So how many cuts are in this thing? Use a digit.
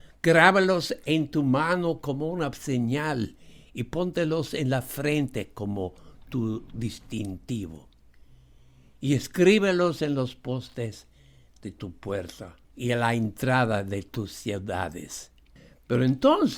1